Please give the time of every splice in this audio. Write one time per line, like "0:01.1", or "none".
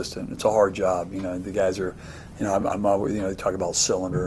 none